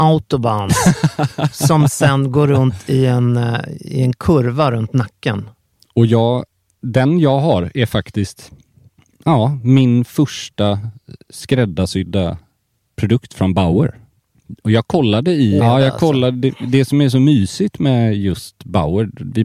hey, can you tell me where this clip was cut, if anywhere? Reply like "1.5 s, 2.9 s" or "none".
15.6 s